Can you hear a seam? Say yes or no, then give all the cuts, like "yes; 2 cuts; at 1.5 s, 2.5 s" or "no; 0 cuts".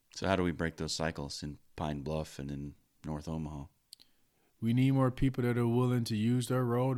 no; 0 cuts